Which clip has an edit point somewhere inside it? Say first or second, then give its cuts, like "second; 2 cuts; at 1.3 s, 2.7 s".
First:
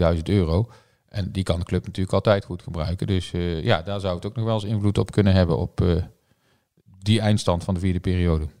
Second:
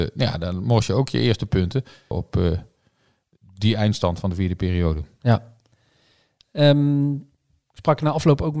second; 1 cut; at 2.1 s